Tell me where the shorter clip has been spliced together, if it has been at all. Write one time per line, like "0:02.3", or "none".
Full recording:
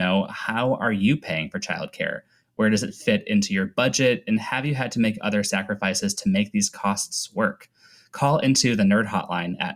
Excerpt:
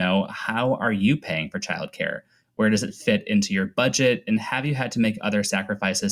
none